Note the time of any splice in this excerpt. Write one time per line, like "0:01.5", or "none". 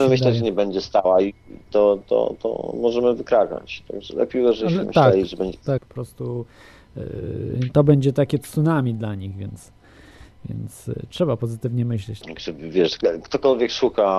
0:05.8
0:12.2